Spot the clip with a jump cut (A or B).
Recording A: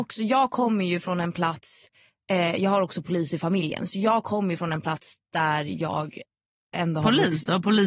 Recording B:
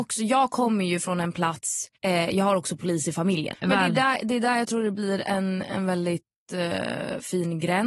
B